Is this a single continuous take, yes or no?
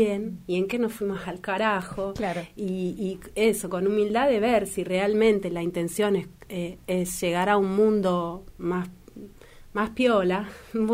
yes